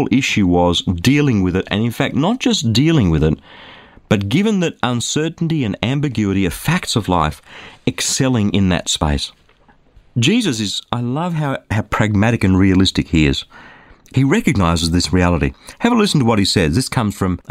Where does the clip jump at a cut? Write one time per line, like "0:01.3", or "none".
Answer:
none